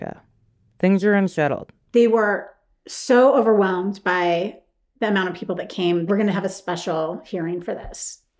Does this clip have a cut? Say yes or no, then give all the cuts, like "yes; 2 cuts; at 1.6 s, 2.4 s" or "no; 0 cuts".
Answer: yes; 2 cuts; at 1.8 s, 6.1 s